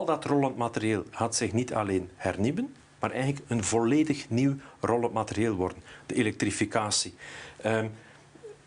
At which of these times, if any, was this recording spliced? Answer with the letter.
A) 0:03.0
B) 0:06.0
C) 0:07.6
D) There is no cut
A